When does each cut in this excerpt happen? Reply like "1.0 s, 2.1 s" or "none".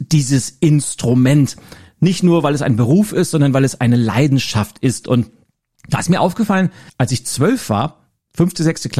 6.9 s